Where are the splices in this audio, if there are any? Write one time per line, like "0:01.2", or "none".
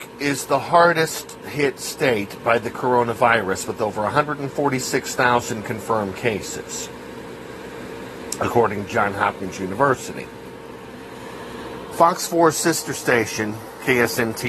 0:11.9

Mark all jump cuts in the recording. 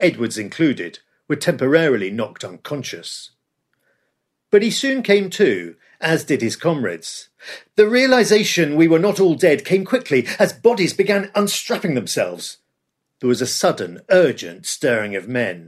none

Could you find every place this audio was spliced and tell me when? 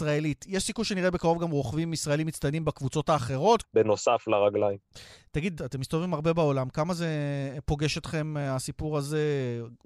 0:03.6
0:05.6

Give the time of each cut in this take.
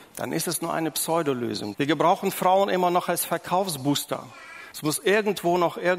0:01.7
0:04.7

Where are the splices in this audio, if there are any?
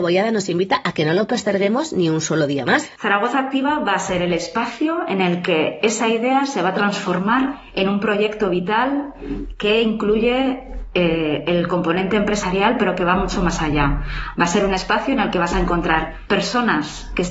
0:03.0

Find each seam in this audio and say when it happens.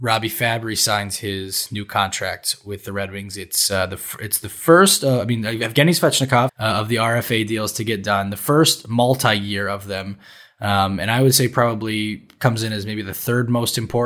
0:06.5

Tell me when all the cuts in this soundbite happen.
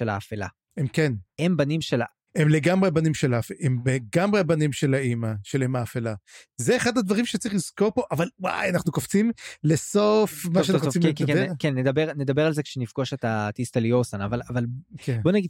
none

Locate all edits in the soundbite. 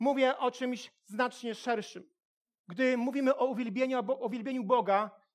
0:02.6

